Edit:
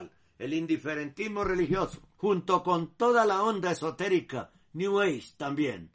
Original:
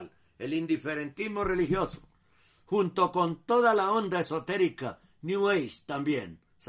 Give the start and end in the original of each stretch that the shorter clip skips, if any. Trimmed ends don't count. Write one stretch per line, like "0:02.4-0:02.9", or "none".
0:02.1-0:02.6